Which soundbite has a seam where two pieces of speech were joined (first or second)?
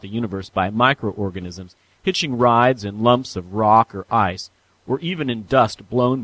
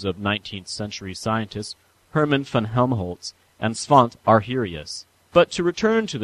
second